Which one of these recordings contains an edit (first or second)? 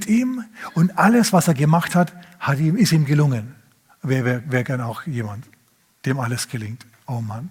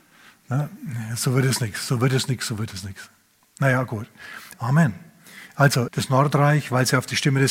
second